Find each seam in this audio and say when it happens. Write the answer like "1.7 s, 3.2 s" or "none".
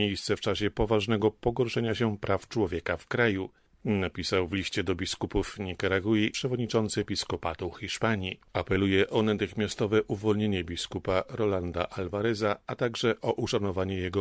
8.5 s